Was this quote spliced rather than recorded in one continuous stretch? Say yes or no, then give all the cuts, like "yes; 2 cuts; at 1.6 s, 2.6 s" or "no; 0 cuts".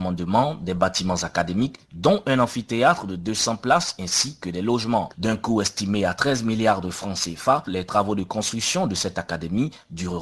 yes; 2 cuts; at 5.1 s, 7.7 s